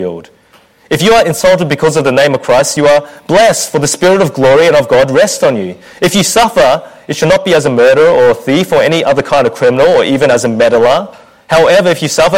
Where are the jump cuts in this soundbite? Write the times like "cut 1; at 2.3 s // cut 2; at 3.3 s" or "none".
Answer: none